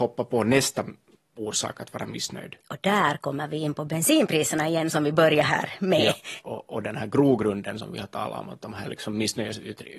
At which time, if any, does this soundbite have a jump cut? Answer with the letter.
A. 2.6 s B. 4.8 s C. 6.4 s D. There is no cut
C